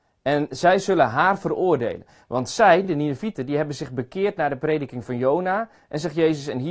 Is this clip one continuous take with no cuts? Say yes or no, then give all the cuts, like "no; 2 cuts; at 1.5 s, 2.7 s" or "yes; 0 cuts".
yes; 0 cuts